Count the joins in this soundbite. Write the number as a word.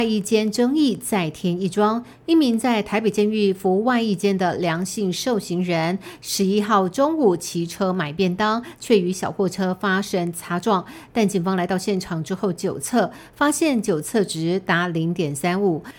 zero